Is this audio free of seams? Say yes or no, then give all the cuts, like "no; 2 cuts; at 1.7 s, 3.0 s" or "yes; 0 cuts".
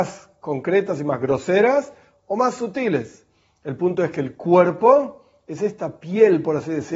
yes; 0 cuts